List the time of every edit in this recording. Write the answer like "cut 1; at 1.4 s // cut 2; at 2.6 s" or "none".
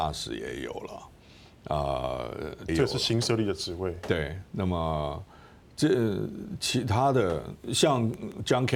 cut 1; at 2.7 s